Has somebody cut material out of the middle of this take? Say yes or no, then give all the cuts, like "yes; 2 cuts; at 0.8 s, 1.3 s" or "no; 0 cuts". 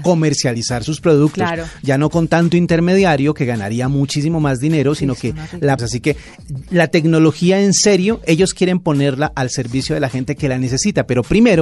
yes; 1 cut; at 5.8 s